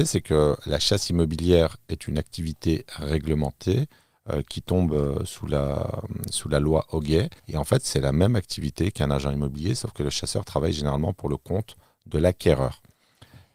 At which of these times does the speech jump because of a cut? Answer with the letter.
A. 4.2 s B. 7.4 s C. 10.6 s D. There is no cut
B